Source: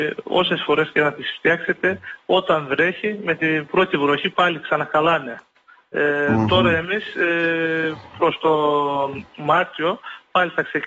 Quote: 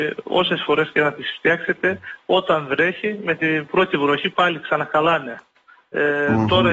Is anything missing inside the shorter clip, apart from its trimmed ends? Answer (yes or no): no